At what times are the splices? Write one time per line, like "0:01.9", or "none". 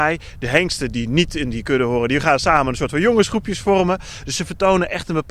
none